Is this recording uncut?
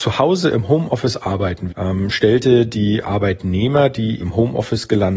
no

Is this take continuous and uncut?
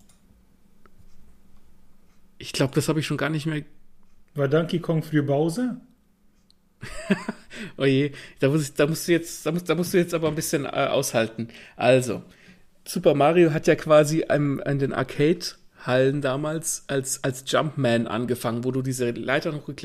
no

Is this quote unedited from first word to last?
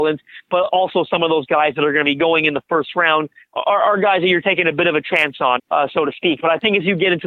no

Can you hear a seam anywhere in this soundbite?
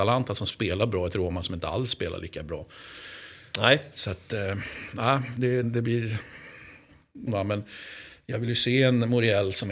yes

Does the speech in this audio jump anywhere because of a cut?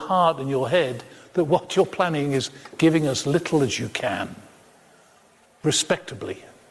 no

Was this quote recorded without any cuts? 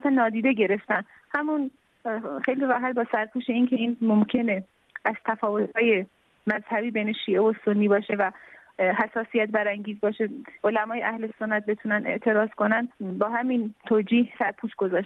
yes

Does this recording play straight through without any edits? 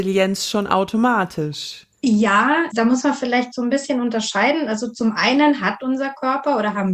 no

